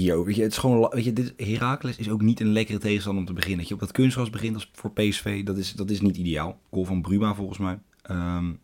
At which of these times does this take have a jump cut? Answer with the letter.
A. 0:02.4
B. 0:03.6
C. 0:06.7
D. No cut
C